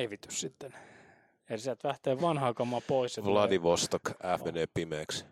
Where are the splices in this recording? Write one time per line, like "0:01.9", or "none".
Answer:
0:02.2
0:04.4